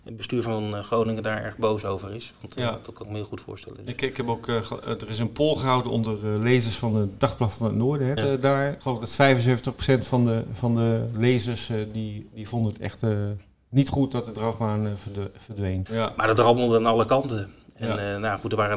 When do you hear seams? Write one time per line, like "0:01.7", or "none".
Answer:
0:08.2
0:15.9